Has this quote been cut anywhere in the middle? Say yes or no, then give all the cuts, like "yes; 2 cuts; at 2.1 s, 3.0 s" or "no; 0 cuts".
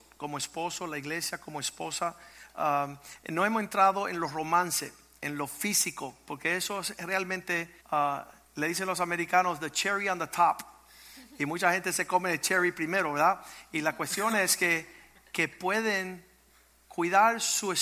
yes; 1 cut; at 7.8 s